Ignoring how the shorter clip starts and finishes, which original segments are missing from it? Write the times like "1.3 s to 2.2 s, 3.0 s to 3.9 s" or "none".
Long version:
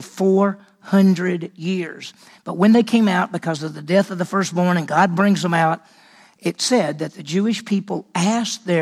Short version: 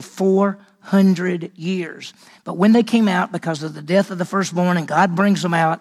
none